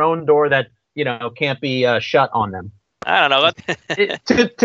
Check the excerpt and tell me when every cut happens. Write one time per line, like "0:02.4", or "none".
0:03.5